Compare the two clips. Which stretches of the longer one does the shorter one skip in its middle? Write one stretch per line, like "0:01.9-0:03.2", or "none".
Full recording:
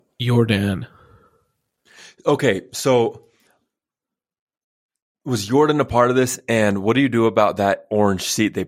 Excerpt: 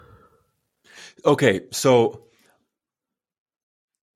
none